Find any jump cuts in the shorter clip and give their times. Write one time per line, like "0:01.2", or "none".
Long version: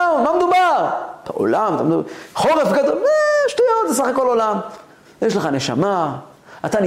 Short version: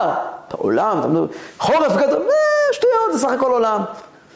none